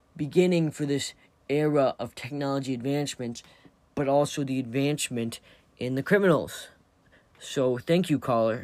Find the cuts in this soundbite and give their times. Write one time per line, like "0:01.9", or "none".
none